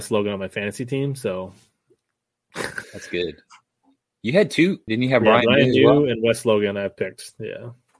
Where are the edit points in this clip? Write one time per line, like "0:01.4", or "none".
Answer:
0:02.8
0:04.9